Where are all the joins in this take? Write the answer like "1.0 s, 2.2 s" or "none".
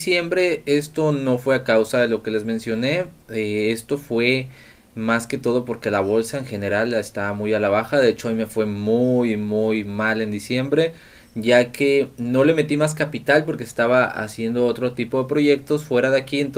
none